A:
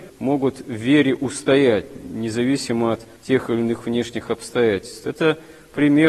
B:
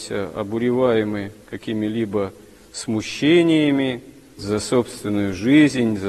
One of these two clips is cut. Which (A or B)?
B